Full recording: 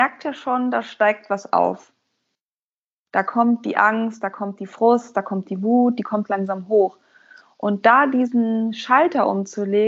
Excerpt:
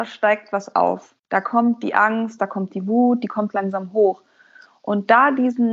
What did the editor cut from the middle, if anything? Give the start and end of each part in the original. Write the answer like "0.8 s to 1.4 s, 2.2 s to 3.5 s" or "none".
2.0 s to 3.0 s, 4.2 s to 5.1 s